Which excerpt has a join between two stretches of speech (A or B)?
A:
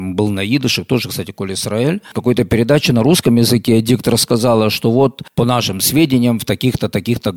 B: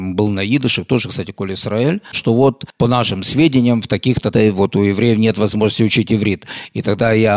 B